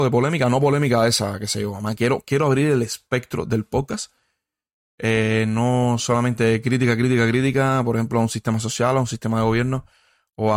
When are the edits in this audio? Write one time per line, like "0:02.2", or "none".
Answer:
none

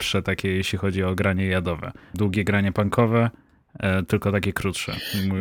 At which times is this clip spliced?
0:02.1

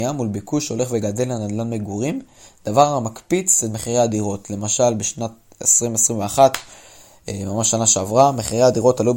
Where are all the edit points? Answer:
none

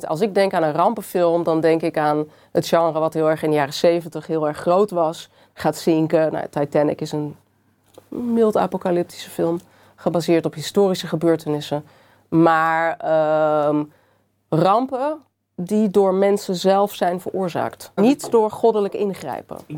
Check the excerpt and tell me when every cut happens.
0:05.5
0:18.0

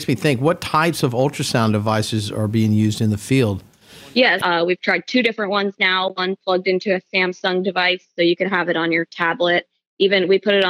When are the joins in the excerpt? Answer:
0:04.4

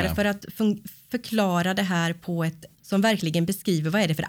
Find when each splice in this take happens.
0:02.7

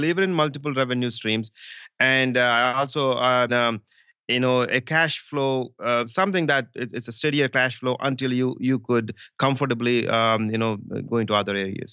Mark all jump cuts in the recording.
0:03.5

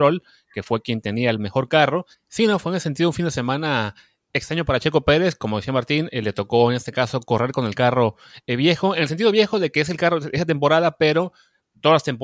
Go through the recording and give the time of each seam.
0:02.1

